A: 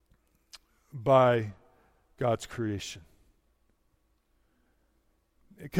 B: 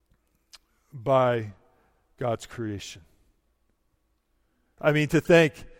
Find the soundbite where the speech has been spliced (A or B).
B